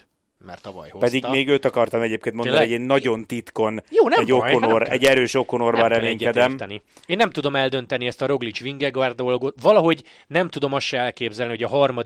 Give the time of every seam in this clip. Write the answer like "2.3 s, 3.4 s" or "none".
none